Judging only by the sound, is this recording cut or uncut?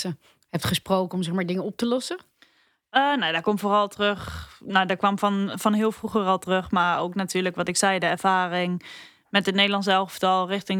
uncut